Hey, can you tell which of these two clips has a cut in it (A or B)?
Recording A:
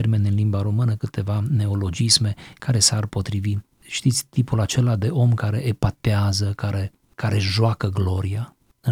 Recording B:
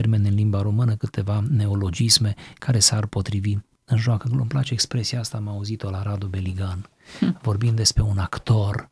B